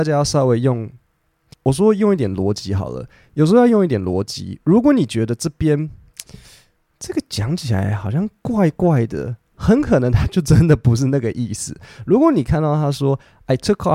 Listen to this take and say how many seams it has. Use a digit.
1